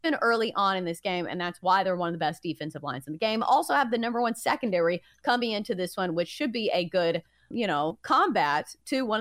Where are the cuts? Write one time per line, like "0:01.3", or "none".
0:07.5

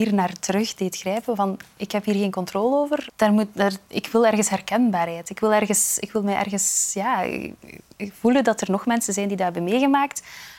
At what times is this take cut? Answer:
0:03.1

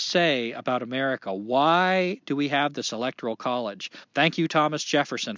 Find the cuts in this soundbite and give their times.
0:04.0

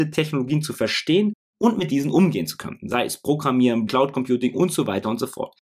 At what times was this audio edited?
0:03.9

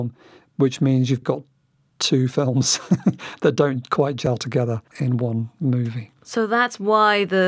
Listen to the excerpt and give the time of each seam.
0:01.2
0:04.9

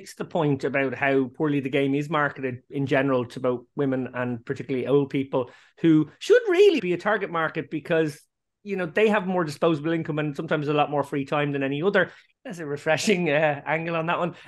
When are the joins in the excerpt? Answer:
0:06.8
0:12.3

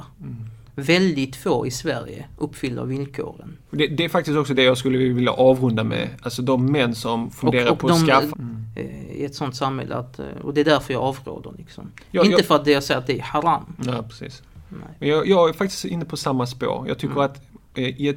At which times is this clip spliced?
0:03.7
0:08.3

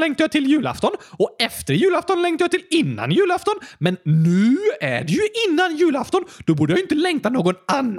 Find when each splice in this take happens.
none

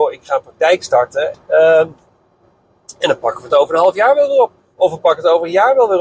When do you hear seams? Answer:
0:01.3

